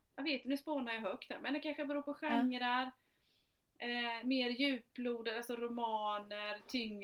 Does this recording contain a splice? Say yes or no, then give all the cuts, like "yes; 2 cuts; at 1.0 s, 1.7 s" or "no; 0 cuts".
no; 0 cuts